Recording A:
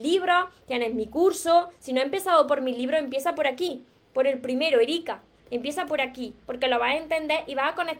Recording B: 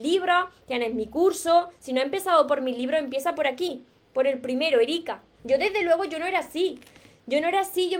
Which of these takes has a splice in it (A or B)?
B